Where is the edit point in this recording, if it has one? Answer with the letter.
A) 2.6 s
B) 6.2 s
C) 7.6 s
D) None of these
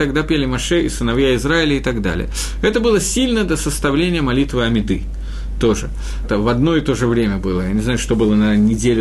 B